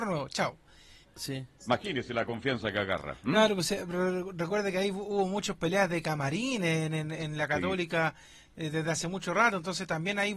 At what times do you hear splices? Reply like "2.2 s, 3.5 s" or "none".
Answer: 1.0 s